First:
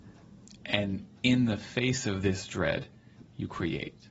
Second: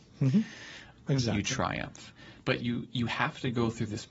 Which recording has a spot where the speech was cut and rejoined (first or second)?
second